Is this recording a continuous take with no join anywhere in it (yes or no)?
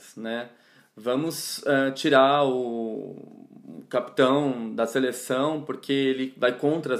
yes